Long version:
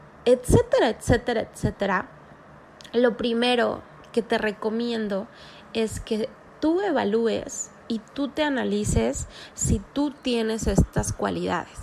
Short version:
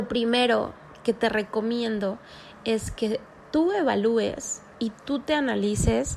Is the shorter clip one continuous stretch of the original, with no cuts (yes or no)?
yes